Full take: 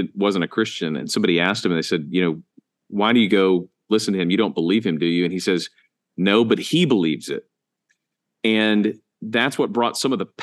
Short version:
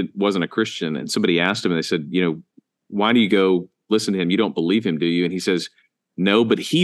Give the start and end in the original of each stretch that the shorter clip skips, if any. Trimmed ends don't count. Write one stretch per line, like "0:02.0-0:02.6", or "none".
none